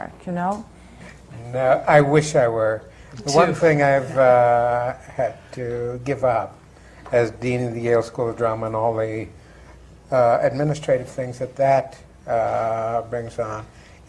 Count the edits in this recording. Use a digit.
1